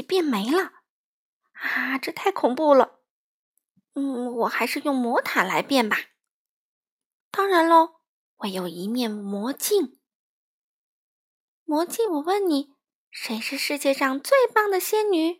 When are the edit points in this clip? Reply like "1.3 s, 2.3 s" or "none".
12.1 s

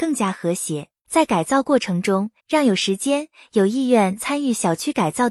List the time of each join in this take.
1.0 s, 2.4 s

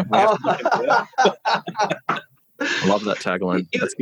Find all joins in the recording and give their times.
none

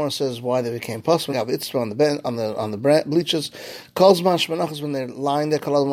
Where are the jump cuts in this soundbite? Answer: 1.3 s

